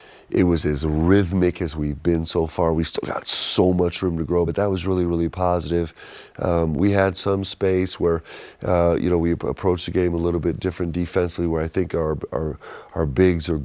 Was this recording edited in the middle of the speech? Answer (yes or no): no